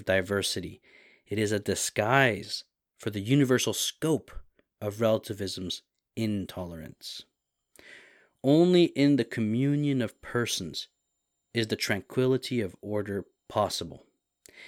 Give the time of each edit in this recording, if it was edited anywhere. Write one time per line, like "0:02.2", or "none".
none